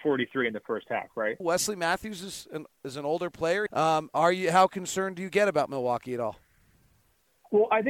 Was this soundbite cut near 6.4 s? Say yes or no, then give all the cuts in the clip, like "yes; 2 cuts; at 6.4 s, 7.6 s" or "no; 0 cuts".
no; 2 cuts; at 1.4 s, 3.7 s